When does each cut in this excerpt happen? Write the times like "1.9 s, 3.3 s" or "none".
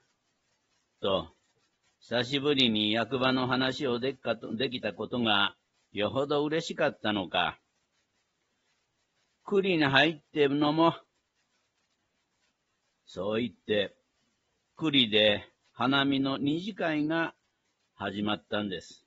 1.0 s